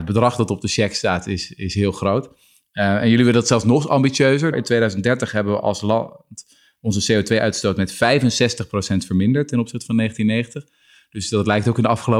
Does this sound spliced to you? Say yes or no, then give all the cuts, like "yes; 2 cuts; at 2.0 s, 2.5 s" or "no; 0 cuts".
yes; 1 cut; at 4.5 s